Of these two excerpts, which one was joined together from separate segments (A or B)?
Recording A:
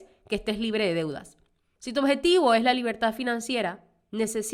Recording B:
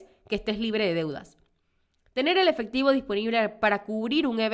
A